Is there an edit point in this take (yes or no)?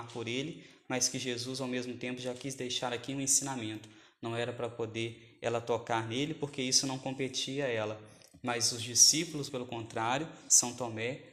yes